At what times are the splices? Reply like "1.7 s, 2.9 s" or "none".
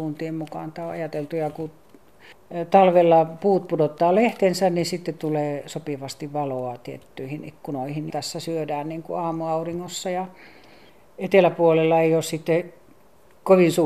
8.1 s